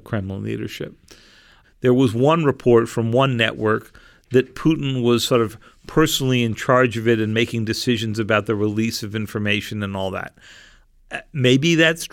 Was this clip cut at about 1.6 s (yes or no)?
yes